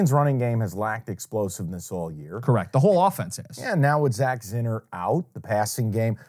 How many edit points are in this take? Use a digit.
0